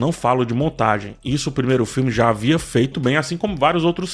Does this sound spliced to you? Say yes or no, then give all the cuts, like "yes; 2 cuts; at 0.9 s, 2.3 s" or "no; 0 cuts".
yes; 1 cut; at 2.9 s